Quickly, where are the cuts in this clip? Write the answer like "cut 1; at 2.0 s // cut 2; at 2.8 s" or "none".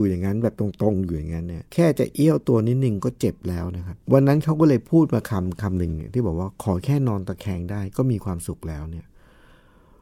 cut 1; at 1.7 s // cut 2; at 4.0 s

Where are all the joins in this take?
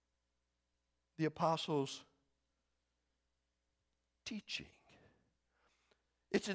none

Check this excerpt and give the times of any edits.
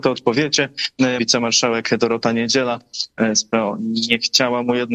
cut 1; at 1.2 s

